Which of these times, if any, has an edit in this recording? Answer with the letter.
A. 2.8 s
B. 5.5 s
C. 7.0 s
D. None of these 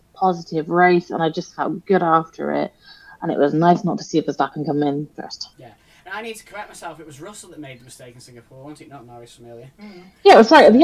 B